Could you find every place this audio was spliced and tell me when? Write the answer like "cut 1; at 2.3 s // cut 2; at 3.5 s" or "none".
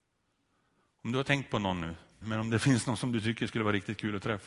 cut 1; at 2.2 s